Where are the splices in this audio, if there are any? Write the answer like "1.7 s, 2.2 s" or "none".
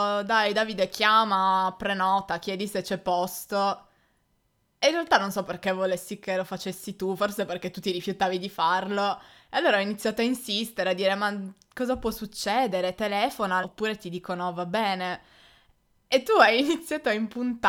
13.6 s